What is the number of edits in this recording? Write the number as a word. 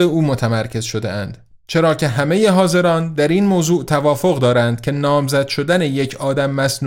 zero